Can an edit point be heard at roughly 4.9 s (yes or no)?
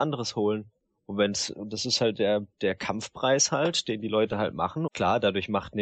yes